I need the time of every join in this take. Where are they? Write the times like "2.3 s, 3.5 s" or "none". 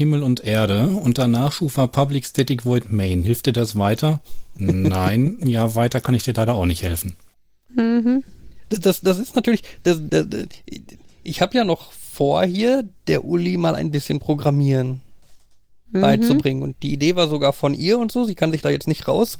10.1 s